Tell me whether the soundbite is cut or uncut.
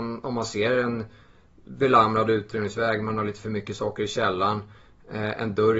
uncut